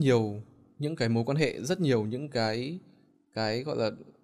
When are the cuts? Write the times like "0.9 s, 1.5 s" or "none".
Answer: none